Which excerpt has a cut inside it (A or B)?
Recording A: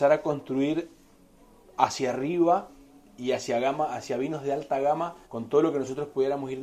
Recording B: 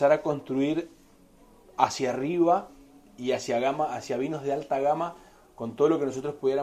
A